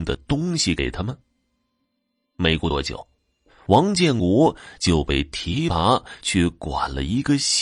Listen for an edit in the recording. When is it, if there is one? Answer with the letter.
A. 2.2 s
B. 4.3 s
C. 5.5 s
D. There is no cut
D